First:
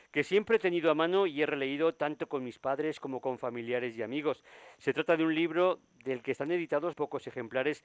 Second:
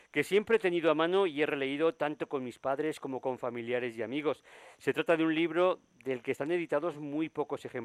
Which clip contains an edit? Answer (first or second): first